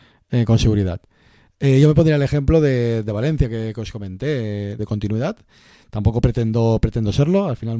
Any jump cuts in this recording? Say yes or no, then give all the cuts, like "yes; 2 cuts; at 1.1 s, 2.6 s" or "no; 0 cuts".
yes; 1 cut; at 4.8 s